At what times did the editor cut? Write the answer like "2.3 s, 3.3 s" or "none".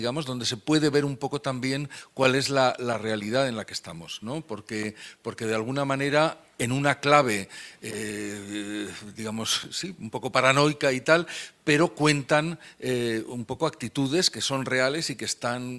none